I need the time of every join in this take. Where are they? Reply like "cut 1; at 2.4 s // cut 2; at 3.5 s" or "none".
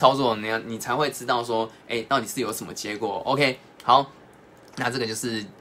none